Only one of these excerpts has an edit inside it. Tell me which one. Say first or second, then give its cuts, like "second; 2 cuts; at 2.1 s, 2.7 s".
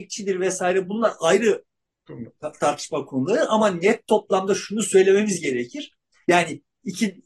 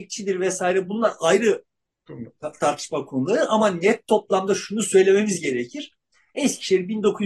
first; 1 cut; at 6.2 s